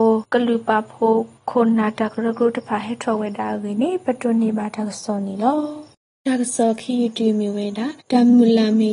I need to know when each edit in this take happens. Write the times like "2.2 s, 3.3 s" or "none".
8.0 s